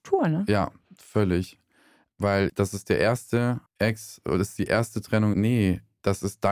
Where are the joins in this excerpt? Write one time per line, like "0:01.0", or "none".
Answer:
0:03.7
0:05.3